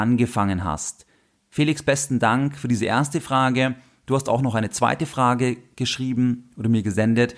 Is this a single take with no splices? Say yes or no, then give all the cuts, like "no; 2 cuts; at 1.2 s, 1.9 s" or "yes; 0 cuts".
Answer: yes; 0 cuts